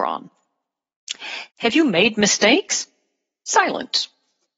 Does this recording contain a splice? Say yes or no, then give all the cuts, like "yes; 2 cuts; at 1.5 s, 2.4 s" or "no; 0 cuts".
yes; 1 cut; at 1.5 s